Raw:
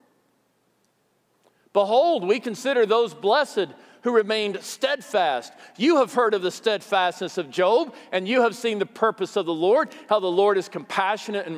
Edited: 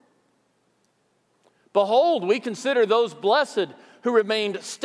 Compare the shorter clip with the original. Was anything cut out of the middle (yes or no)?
no